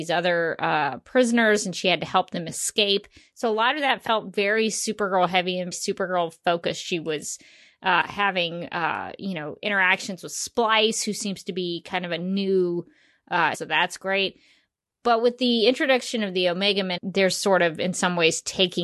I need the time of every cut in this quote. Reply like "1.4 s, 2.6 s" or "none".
5.7 s, 13.5 s, 17.0 s